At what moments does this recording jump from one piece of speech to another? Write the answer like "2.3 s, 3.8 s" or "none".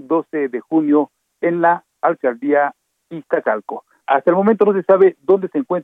4.0 s